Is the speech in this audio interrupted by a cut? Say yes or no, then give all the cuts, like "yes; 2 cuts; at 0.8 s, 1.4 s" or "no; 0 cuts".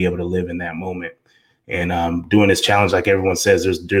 no; 0 cuts